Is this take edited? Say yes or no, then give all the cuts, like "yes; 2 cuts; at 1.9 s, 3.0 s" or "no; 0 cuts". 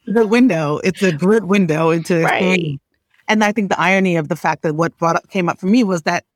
no; 0 cuts